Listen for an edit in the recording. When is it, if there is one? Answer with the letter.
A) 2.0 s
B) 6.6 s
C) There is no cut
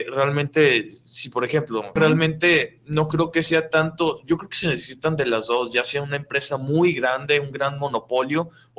A